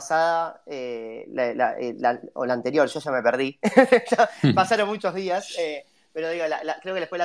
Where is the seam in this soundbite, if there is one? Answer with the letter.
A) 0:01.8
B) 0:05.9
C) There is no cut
C